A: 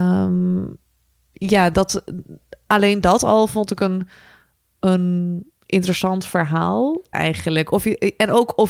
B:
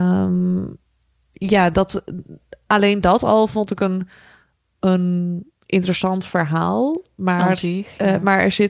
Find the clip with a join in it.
A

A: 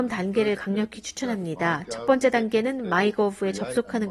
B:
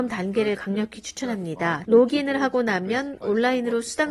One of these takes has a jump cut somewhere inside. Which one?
B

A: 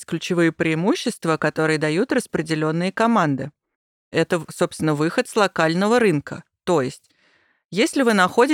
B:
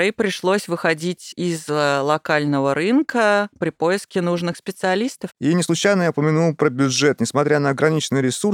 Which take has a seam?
B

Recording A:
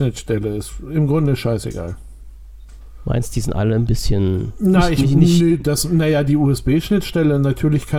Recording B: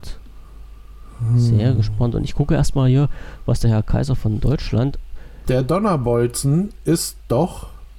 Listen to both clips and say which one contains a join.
B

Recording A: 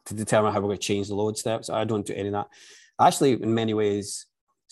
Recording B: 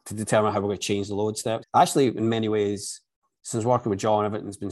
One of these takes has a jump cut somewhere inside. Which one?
B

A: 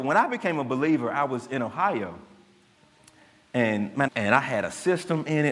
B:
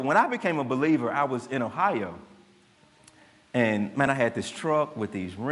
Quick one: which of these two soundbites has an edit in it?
A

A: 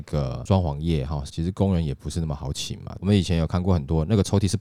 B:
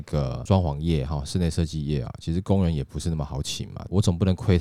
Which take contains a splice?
A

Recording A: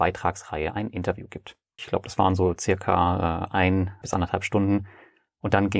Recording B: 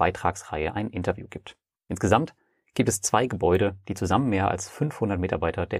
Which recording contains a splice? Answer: A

